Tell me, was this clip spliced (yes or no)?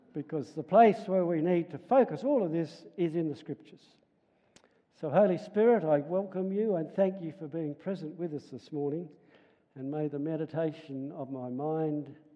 no